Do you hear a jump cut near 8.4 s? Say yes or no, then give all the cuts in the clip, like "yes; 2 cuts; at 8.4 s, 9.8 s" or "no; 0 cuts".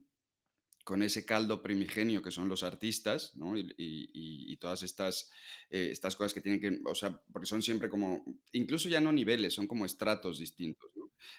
yes; 1 cut; at 8.4 s